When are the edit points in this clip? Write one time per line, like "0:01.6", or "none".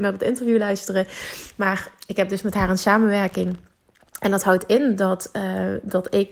none